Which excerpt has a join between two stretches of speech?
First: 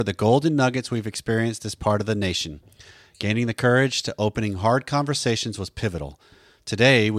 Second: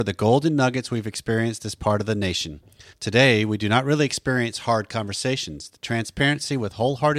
second; 1 cut; at 2.9 s

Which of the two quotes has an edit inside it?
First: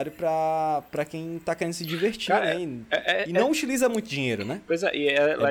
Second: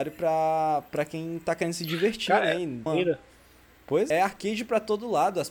second; 2 cuts; at 2.9 s, 4.1 s

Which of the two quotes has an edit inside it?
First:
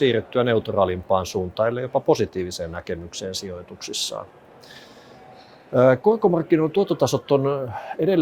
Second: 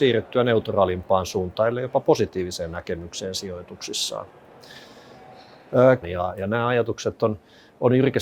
second; 1 cut; at 6.0 s

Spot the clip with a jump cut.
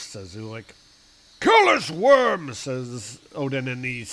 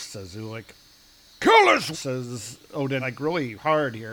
second; 2 cuts; at 1.9 s, 3.0 s

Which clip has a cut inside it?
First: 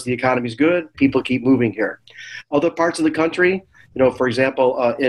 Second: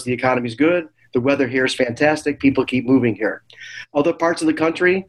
first; 1 cut; at 0.9 s

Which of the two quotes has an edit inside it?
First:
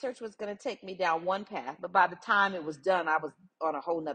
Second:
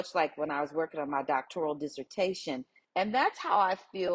second; 1 cut; at 2.8 s

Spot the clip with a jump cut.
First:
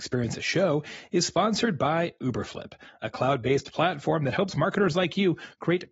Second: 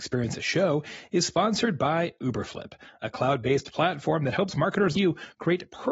second; 1 cut; at 4.9 s

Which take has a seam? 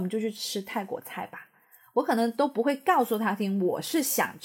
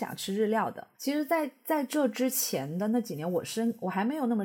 second; 1 cut; at 0.9 s

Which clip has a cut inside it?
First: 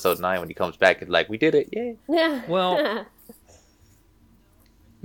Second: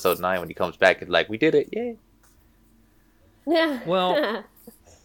first; 1 cut; at 2.0 s

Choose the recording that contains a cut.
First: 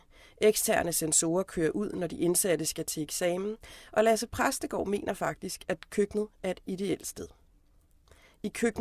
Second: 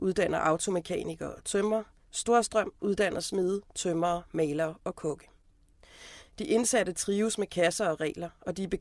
second; 1 cut; at 6.2 s

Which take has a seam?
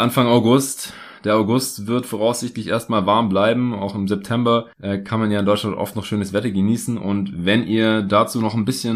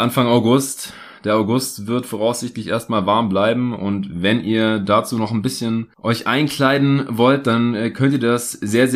second; 1 cut; at 3.8 s

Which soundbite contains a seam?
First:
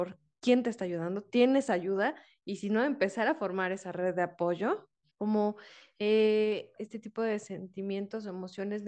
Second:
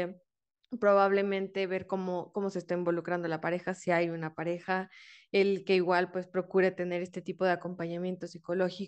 first; 2 cuts; at 5.1 s, 6.8 s

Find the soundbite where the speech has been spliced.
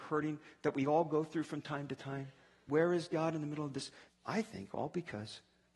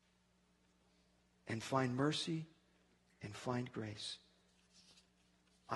first; 2 cuts; at 2.7 s, 4.1 s

